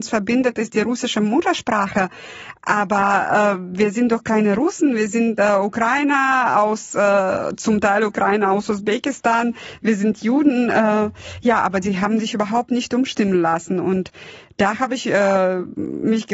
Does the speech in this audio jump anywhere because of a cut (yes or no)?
no